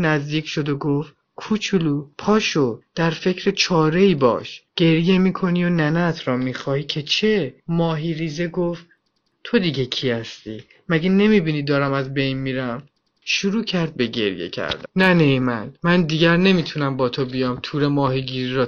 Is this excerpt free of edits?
yes; 0 cuts

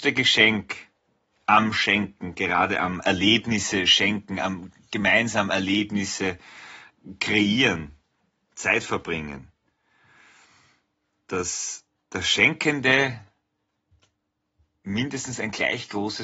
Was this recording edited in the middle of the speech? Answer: no; 0 cuts

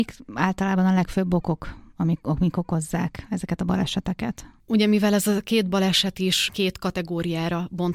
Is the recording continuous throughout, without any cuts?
yes; 0 cuts

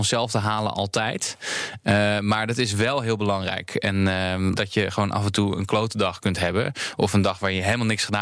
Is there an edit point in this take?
yes; 1 cut; at 4.5 s

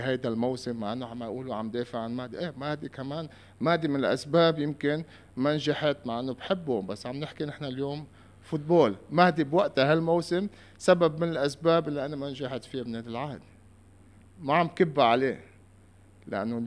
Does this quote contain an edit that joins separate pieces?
no; 0 cuts

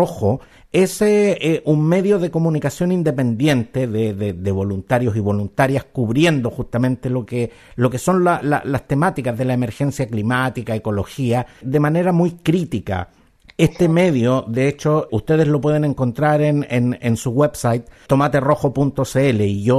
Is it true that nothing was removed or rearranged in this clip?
no; 2 cuts; at 15.1 s, 18.1 s

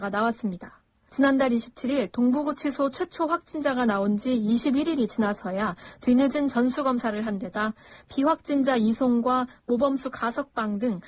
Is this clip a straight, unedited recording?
no; 1 cut; at 1.1 s

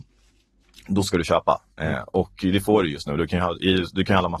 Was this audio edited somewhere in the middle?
no; 0 cuts

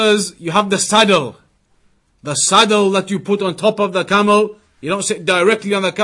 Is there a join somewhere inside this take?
no; 0 cuts

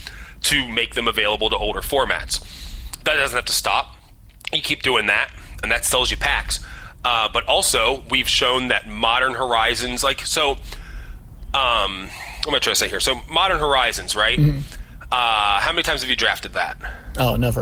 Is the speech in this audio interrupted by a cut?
yes; 1 cut; at 5.6 s

